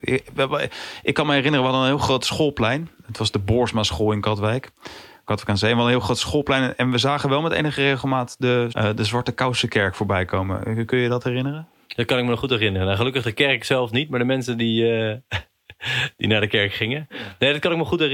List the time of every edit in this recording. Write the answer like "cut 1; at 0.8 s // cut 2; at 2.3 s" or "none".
cut 1; at 8.7 s